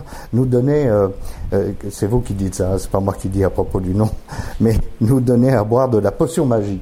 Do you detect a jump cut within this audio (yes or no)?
no